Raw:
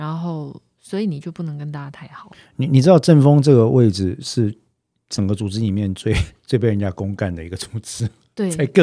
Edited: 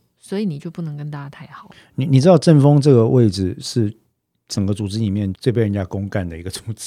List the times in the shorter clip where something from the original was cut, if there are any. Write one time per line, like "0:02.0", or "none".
0:05.3